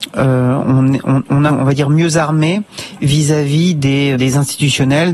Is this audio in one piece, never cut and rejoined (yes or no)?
no